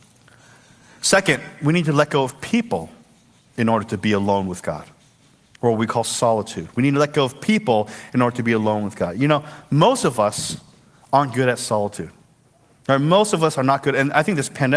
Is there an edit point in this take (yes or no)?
no